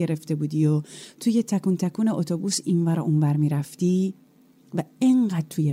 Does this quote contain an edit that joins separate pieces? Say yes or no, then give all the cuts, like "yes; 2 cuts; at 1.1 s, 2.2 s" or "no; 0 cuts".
no; 0 cuts